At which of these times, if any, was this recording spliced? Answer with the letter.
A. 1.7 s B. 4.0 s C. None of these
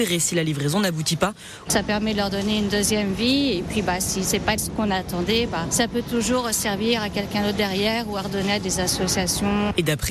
A